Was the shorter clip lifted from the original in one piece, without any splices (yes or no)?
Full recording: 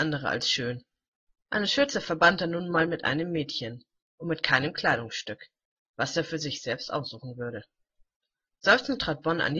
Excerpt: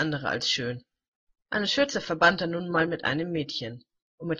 yes